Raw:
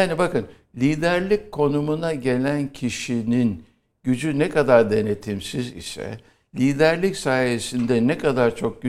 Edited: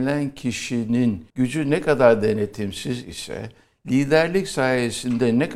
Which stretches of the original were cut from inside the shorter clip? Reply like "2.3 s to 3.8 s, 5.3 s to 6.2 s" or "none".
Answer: 3.7 s to 4.0 s